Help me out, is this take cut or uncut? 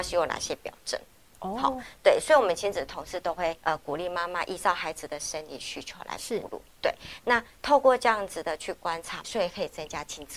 cut